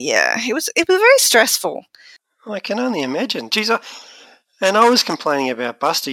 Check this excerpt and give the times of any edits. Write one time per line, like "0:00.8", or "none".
none